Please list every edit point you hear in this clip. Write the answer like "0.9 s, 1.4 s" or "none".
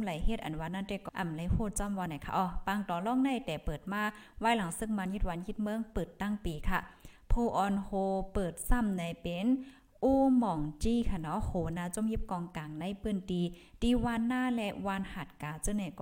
1.1 s